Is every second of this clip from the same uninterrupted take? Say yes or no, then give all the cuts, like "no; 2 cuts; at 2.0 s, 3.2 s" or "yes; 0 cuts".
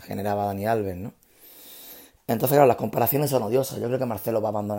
yes; 0 cuts